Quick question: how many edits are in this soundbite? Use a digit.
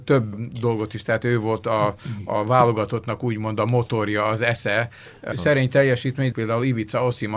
2